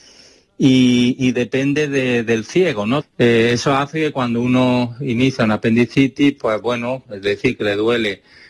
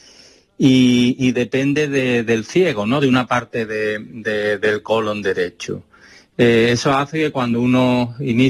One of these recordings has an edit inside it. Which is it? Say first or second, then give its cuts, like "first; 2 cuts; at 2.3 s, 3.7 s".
first; 2 cuts; at 3.0 s, 7.0 s